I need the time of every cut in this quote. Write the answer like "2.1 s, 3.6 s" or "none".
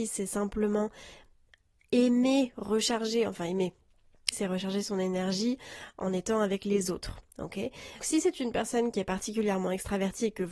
4.3 s, 8.0 s